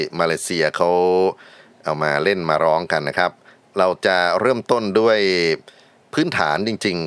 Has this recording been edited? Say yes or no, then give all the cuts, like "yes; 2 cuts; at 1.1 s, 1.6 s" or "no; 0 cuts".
no; 0 cuts